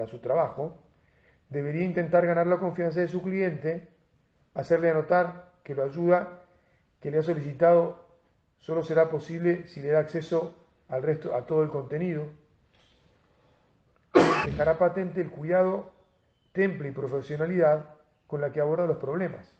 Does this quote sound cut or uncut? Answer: cut